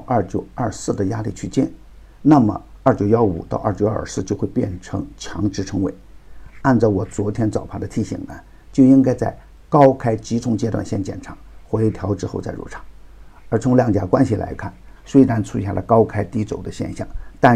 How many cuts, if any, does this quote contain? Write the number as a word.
one